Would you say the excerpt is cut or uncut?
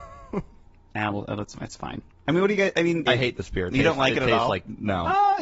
cut